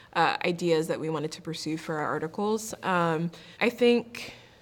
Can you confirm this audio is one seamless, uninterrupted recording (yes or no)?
no